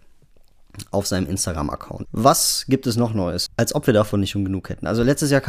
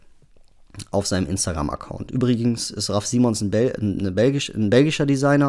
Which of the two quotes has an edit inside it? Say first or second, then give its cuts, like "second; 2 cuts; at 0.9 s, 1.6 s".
first; 2 cuts; at 2.0 s, 3.5 s